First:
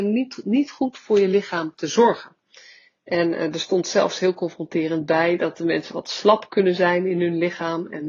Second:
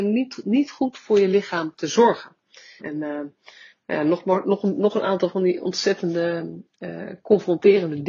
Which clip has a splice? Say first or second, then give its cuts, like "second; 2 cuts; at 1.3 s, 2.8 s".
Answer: second; 1 cut; at 2.8 s